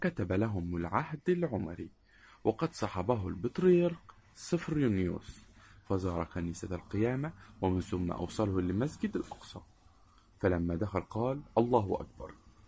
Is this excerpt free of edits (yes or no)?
yes